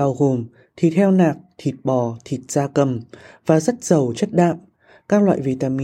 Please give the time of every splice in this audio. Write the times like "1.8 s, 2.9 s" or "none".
none